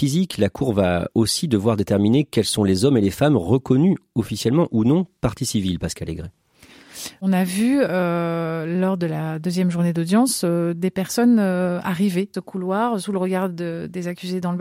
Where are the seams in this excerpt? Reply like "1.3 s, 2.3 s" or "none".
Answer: 12.3 s